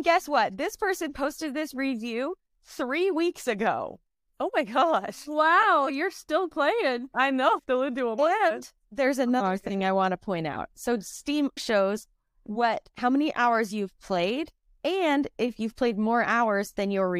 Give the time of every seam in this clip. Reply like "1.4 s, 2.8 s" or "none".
7.6 s, 11.6 s, 12.9 s